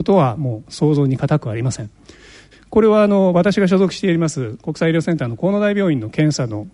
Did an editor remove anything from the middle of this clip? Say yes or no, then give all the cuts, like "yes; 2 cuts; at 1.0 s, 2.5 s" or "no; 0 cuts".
yes; 1 cut; at 2.5 s